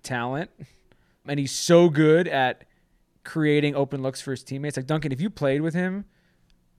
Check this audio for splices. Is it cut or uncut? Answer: cut